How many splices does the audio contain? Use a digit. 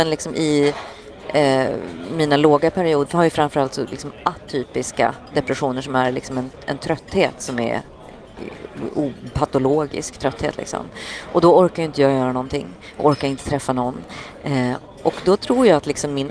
1